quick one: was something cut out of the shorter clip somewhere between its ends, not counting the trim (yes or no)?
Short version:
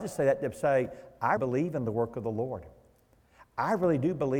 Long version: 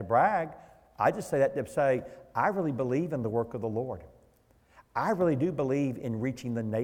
yes